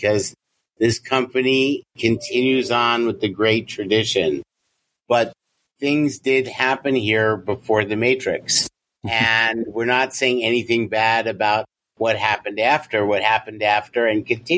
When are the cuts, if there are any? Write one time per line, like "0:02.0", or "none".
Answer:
0:05.0

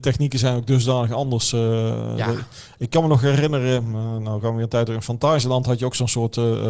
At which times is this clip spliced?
none

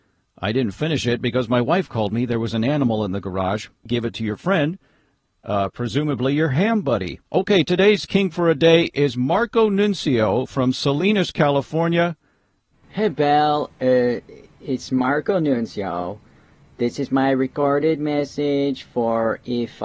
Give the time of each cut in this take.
0:03.9
0:07.3
0:12.7

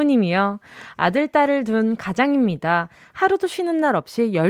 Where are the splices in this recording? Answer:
none

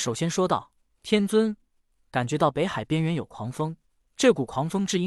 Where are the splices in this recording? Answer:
0:01.9

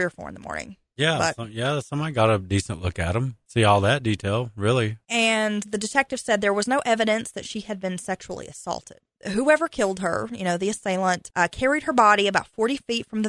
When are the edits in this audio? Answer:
none

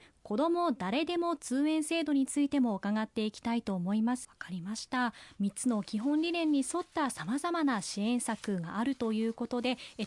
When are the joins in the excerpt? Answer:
0:04.2

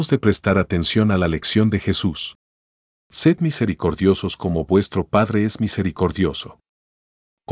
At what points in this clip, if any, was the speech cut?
none

